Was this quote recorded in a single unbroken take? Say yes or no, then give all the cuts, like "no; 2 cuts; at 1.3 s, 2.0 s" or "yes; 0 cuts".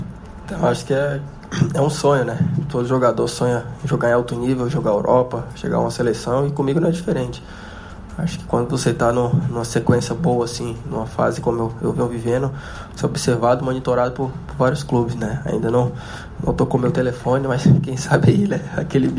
yes; 0 cuts